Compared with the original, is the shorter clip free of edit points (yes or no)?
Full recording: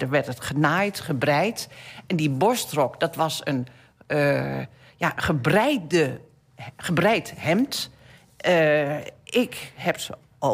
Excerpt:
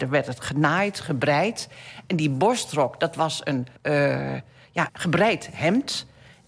no